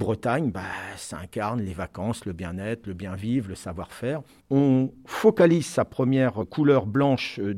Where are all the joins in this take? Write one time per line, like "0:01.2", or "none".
0:04.4